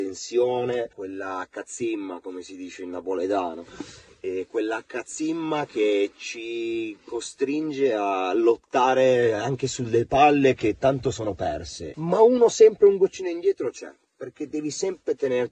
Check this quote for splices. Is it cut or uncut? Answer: cut